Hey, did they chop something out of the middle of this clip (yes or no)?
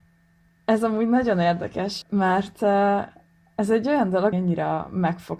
yes